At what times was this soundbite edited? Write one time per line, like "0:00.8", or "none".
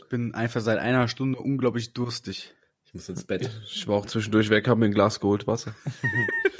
none